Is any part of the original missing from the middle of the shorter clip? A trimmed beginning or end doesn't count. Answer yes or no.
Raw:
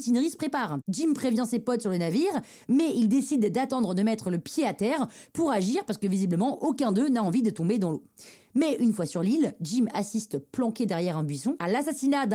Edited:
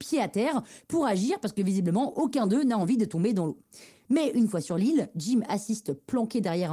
no